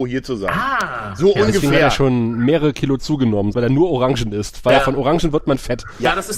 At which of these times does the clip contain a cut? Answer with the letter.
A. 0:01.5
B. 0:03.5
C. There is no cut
B